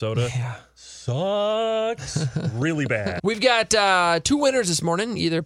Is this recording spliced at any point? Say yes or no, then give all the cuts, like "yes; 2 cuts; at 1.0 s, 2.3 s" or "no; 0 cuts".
yes; 1 cut; at 3.2 s